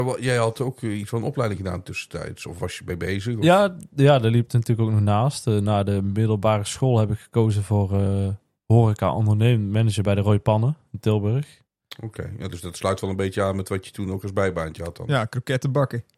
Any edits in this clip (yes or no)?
no